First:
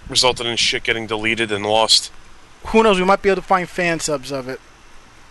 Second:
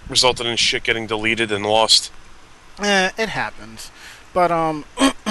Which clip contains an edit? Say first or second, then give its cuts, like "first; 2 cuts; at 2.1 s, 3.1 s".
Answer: first; 1 cut; at 2.6 s